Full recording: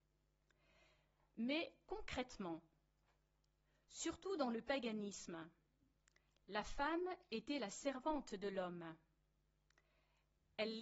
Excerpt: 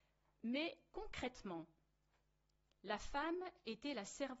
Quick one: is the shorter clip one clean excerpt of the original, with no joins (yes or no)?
no